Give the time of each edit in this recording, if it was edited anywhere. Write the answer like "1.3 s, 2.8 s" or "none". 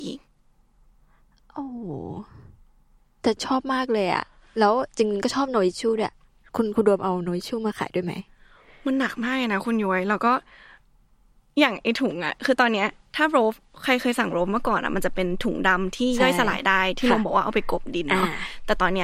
none

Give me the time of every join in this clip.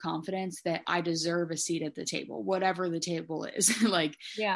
none

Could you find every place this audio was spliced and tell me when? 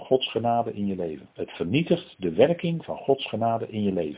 1.3 s

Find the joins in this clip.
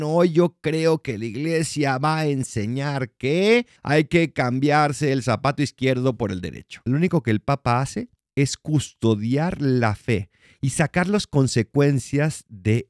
3.8 s, 6.9 s

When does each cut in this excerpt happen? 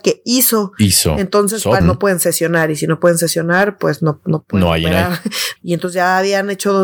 1.8 s, 5.6 s

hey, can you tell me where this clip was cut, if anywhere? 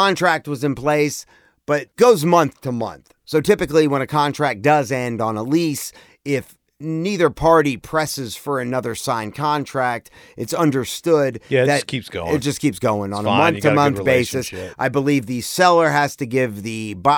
1.9 s

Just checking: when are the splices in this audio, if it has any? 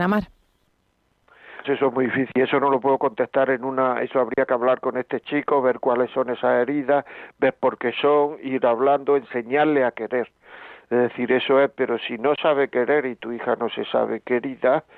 1.6 s

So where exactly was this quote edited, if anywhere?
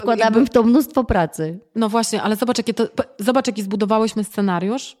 none

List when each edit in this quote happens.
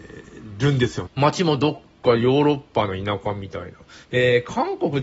1.1 s, 4.0 s

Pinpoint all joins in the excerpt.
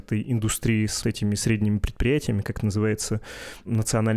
1.0 s

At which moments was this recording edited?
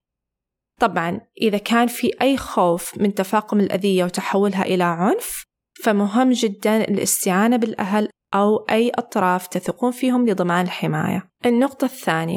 11.3 s

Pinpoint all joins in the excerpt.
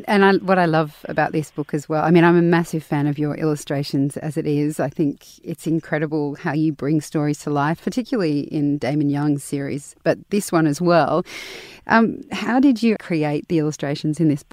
11.8 s, 13.0 s

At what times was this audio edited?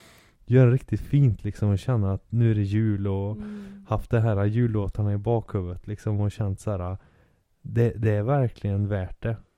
none

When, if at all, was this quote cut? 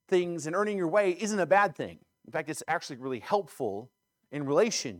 none

